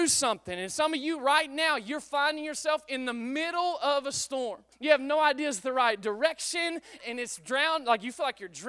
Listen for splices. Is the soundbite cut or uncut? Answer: cut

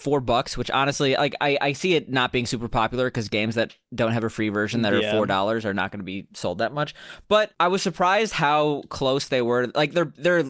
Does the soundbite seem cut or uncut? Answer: uncut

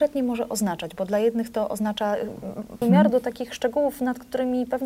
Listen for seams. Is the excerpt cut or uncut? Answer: cut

